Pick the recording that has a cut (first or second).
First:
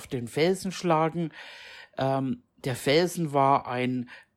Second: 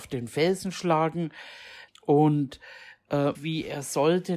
second